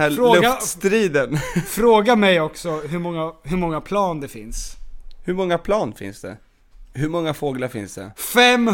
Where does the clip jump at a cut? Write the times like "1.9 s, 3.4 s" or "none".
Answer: 6.9 s